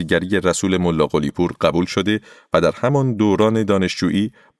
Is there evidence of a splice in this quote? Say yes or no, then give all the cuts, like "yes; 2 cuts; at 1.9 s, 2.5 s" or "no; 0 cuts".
no; 0 cuts